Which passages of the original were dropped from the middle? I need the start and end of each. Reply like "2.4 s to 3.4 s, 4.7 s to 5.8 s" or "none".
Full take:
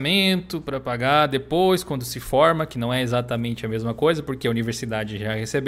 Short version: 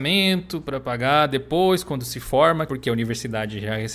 2.7 s to 4.3 s